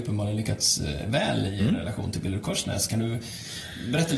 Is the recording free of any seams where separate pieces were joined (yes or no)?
yes